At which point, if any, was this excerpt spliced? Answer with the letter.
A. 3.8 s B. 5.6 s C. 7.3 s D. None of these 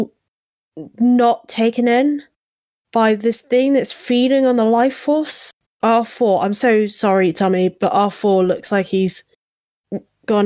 B